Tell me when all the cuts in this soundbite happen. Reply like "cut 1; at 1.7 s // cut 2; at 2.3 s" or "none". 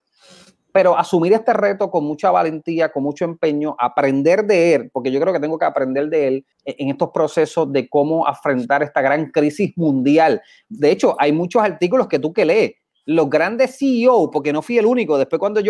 cut 1; at 6.5 s